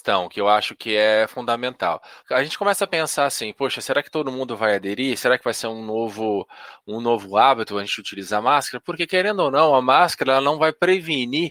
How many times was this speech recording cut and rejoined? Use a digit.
1